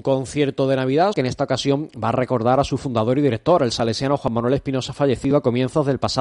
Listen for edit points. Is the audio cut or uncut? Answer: cut